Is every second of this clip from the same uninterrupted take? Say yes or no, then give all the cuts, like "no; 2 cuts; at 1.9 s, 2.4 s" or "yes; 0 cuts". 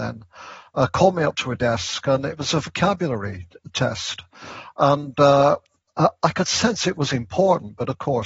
yes; 0 cuts